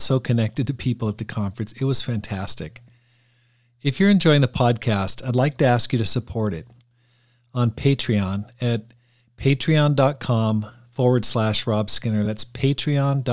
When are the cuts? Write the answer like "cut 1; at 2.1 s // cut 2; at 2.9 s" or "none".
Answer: none